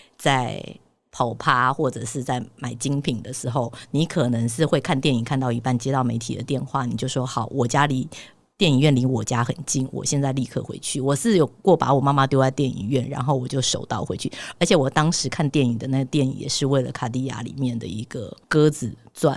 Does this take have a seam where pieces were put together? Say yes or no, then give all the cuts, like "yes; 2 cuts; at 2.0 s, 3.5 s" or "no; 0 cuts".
no; 0 cuts